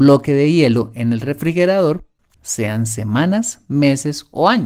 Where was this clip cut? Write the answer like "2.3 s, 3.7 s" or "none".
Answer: 2.3 s